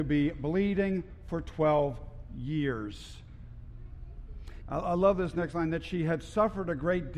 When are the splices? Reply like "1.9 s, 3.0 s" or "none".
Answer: 4.6 s